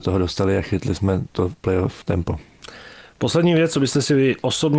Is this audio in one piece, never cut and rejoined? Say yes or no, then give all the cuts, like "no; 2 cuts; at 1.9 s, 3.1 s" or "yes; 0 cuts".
yes; 0 cuts